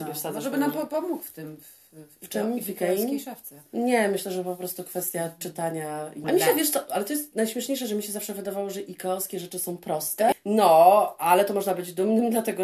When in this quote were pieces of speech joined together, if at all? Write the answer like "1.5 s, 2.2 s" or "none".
6.2 s, 10.3 s